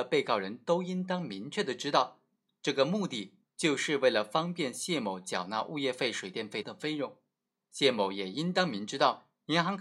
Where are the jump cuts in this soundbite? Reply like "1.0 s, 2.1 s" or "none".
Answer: 6.6 s

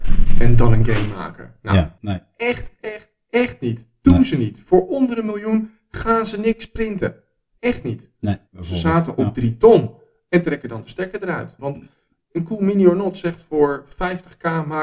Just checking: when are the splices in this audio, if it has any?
2.0 s, 8.5 s, 11.6 s

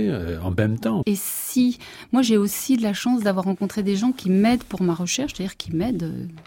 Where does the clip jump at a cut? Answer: 1.0 s

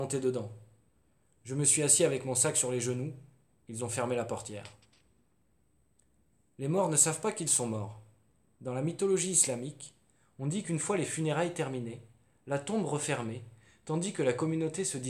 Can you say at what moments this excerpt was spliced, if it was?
none

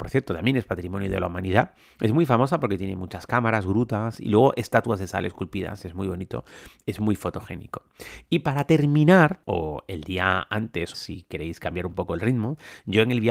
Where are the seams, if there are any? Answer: 9.4 s, 10.9 s

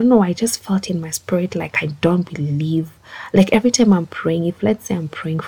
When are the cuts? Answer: none

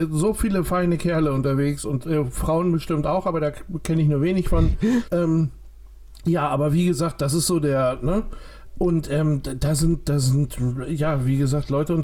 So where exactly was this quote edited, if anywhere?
5.1 s

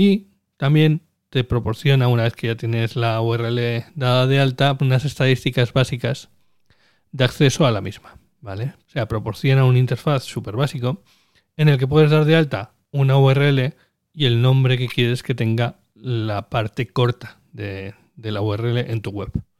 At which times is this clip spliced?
4.8 s, 8.8 s

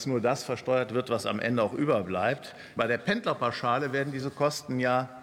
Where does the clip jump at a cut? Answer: 2.8 s

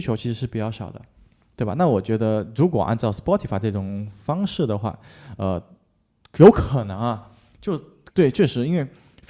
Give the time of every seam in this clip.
8.1 s

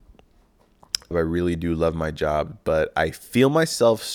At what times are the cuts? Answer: 1.1 s

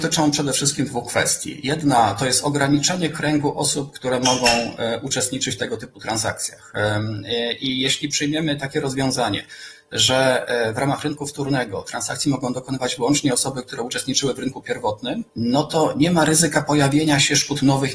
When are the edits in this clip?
15.3 s

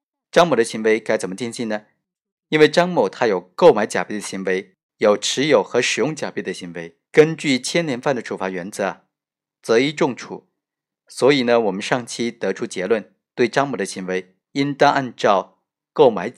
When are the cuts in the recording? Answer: 7.1 s

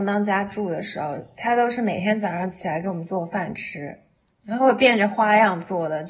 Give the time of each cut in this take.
none

